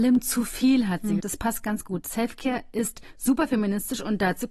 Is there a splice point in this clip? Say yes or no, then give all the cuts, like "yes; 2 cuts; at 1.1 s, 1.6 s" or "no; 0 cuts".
yes; 1 cut; at 1.2 s